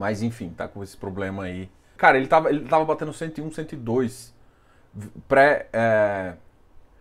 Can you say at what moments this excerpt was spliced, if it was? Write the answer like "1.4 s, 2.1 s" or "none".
2.0 s